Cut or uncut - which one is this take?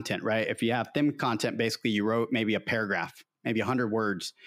uncut